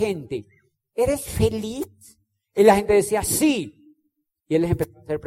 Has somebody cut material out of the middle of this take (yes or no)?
no